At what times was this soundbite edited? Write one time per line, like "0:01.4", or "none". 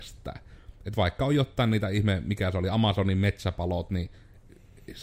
none

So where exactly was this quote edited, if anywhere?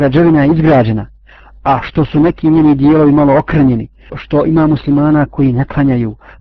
0:04.1

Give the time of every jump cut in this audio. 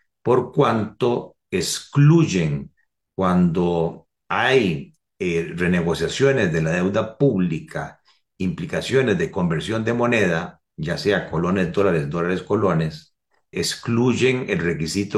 0:13.5

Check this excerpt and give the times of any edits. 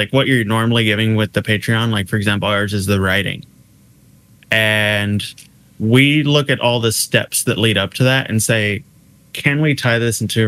none

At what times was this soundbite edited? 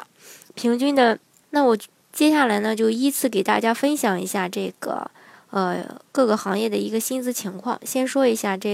0:01.4

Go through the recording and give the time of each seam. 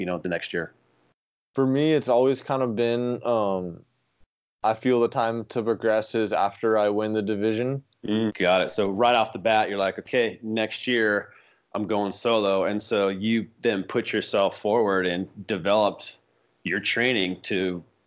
0:08.3

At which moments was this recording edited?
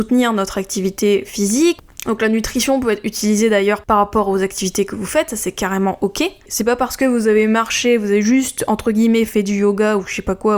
0:06.5

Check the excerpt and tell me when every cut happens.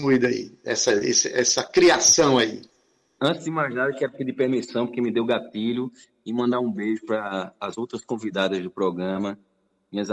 0:03.2

